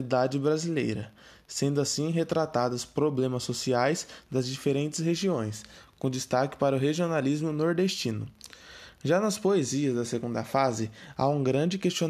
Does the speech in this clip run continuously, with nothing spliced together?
yes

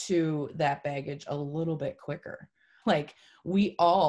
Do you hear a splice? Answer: yes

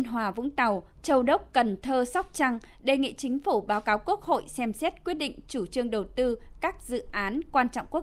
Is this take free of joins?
no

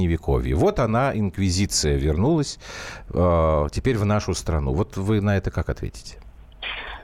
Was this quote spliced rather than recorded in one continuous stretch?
no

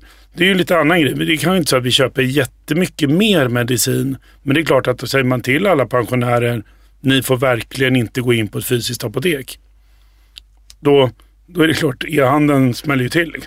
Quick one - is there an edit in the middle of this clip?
no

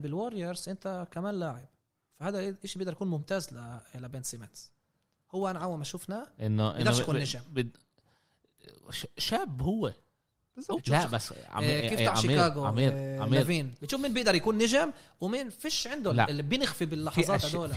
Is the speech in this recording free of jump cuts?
no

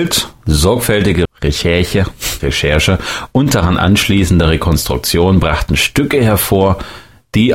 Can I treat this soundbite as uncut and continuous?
no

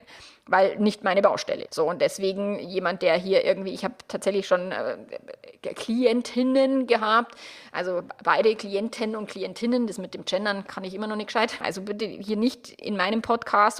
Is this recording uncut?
no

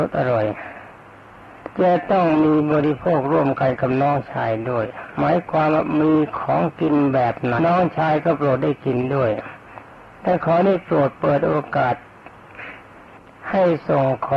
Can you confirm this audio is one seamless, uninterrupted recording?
no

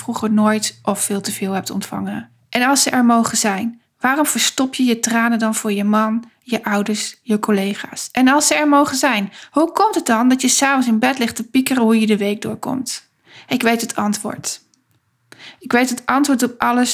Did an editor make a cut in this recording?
no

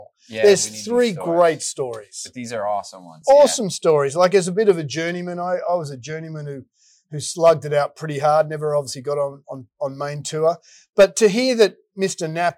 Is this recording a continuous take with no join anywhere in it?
yes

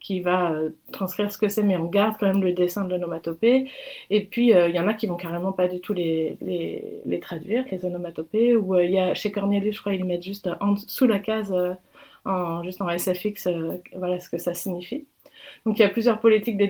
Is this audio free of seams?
yes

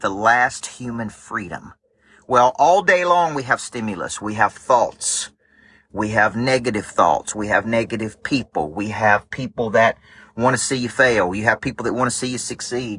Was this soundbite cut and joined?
no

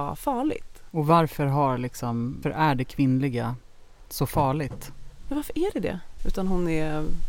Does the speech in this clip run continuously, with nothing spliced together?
no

